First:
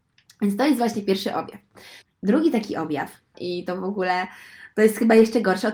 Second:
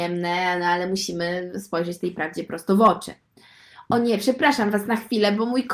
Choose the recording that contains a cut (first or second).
first